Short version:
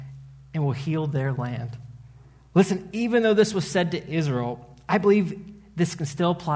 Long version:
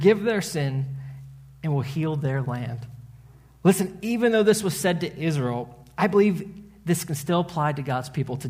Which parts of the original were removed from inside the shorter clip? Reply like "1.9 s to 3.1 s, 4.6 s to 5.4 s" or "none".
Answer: none